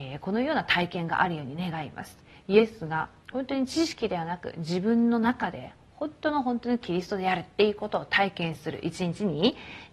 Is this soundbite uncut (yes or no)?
yes